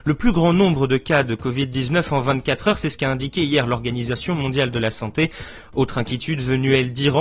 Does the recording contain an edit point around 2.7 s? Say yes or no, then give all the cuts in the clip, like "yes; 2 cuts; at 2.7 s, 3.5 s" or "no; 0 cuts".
no; 0 cuts